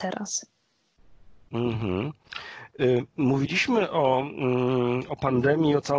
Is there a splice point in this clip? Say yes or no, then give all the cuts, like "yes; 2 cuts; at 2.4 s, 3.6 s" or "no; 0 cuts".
no; 0 cuts